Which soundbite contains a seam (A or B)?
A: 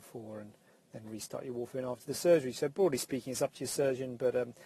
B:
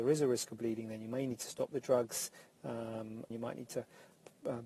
B